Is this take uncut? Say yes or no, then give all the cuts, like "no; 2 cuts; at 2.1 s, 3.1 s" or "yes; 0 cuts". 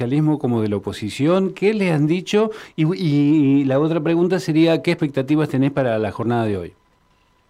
yes; 0 cuts